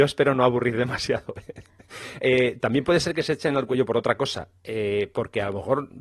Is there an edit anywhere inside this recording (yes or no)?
no